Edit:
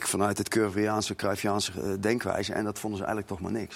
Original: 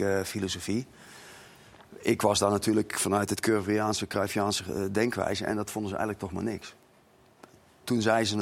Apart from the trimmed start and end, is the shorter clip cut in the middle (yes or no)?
no